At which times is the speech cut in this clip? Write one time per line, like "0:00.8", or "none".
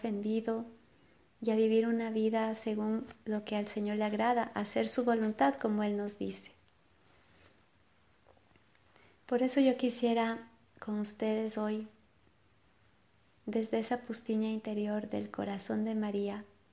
none

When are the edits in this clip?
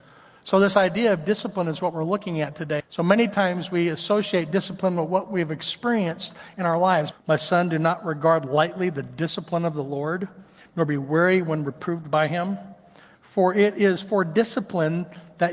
0:02.8
0:07.1
0:13.1

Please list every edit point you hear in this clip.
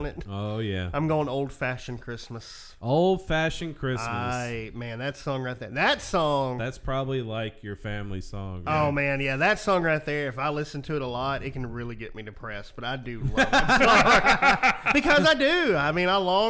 none

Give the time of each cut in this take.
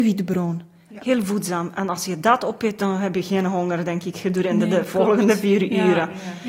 0:01.0

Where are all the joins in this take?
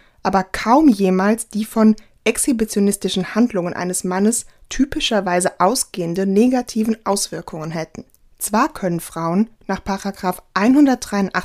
0:08.3

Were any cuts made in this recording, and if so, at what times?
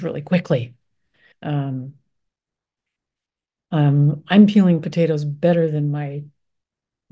0:01.3

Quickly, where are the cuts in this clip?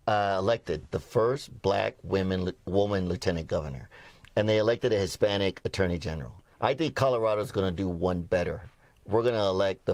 0:06.5

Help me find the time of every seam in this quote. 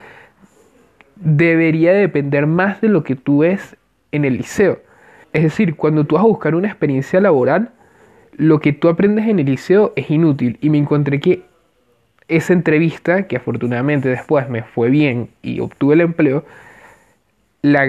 0:05.2

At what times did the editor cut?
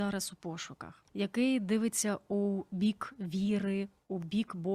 0:01.1

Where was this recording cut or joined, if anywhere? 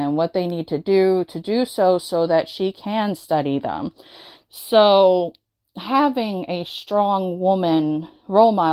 0:04.3

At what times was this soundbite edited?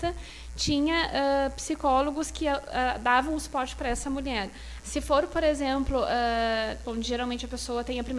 0:04.8
0:06.8

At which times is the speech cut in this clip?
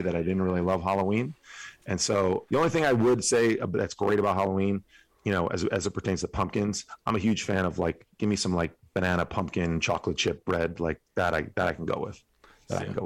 0:02.5

